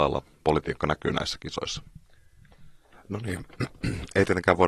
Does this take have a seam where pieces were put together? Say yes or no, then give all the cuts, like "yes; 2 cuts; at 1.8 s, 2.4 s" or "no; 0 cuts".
yes; 1 cut; at 2.9 s